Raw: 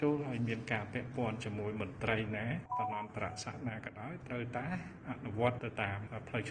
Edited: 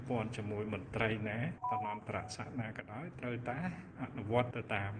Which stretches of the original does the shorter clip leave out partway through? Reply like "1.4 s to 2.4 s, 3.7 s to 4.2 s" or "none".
none